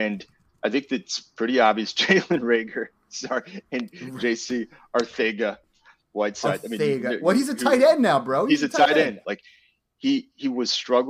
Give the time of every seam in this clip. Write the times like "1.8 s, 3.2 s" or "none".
9.2 s